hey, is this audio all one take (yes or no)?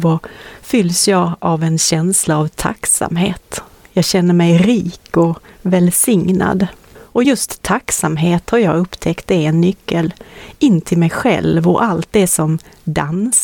yes